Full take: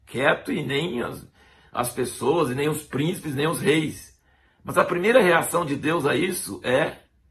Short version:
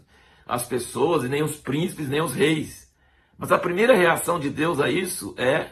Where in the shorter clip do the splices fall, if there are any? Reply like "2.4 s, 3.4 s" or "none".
none